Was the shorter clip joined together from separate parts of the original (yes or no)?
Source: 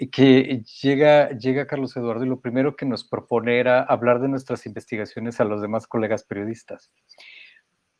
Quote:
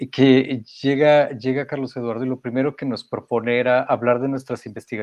no